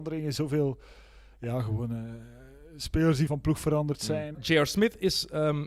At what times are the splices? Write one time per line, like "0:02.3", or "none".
0:03.3
0:04.3